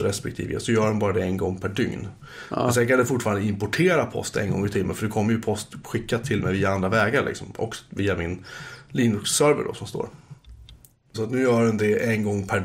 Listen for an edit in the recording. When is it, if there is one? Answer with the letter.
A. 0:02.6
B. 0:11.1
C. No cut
B